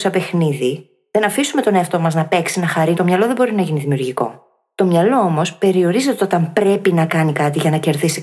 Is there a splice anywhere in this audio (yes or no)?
yes